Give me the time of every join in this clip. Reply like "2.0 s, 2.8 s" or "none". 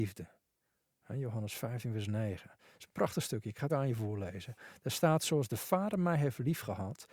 3.7 s